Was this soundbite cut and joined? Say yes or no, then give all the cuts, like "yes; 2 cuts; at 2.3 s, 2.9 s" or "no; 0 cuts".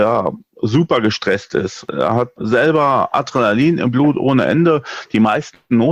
no; 0 cuts